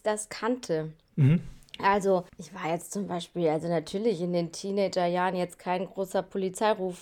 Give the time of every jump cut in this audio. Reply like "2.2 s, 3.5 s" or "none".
2.3 s

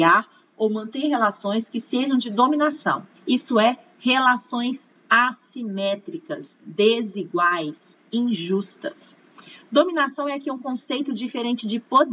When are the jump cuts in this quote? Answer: 3.2 s

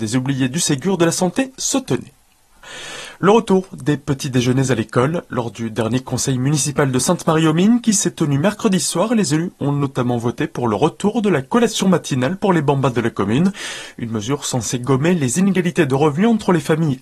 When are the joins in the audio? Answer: none

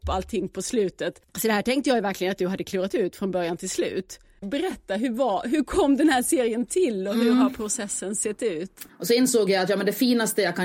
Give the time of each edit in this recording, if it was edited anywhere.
4.4 s, 8.9 s

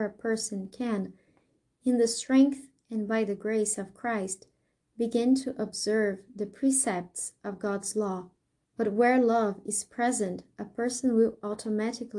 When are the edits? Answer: 8.6 s

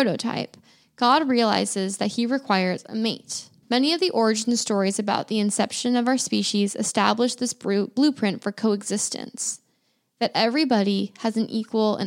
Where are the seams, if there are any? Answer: 3.6 s

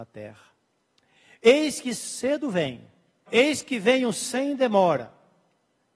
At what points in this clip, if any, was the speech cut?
3.3 s

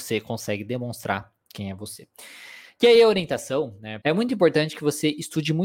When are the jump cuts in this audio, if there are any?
4.0 s

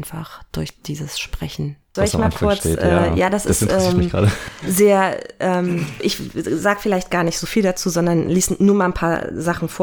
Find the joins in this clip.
2.0 s, 6.0 s

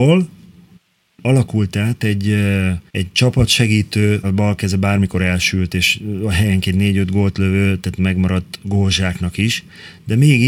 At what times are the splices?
2.9 s, 4.2 s

